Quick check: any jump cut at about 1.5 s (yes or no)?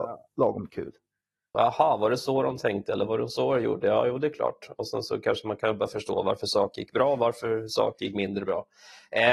yes